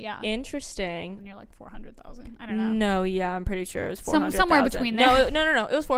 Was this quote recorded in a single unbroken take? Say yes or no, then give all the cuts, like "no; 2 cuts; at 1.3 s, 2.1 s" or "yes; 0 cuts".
no; 1 cut; at 1.2 s